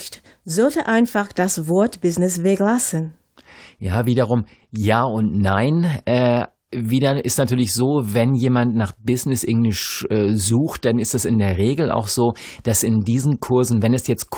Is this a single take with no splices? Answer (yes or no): yes